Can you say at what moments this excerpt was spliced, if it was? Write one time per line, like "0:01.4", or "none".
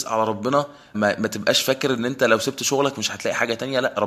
0:00.9